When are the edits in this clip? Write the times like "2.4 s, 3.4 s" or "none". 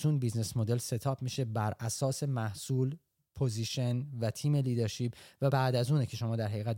5.5 s